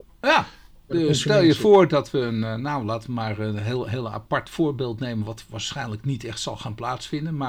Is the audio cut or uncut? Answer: uncut